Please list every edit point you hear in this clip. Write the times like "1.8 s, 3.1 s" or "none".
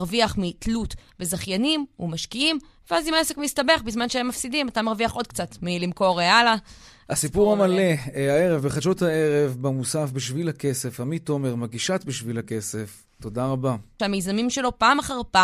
14.0 s